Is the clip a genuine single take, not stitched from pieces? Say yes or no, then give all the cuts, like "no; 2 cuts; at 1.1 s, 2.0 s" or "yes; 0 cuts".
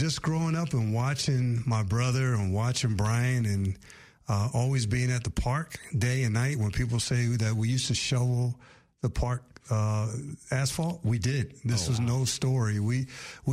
yes; 0 cuts